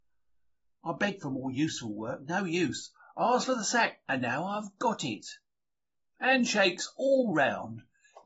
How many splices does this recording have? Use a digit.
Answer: 0